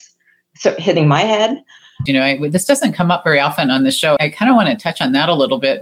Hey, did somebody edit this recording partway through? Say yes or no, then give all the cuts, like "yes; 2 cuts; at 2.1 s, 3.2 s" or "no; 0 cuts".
yes; 2 cuts; at 2.1 s, 4.2 s